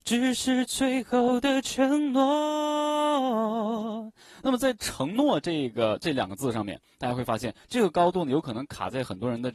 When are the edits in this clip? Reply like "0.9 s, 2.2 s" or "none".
none